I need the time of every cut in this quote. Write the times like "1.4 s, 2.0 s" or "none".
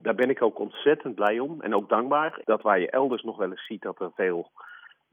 2.4 s